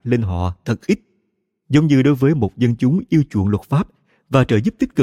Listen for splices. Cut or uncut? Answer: uncut